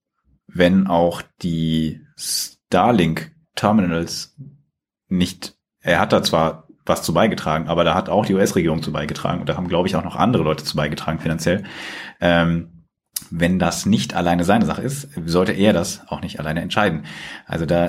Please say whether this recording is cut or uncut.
uncut